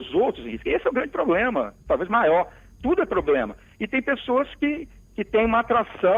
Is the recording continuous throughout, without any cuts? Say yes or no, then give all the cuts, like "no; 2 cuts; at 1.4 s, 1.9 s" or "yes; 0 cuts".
yes; 0 cuts